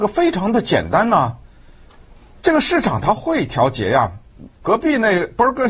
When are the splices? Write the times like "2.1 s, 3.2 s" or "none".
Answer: 4.6 s